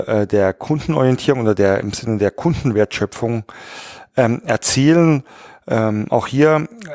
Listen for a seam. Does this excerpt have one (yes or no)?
no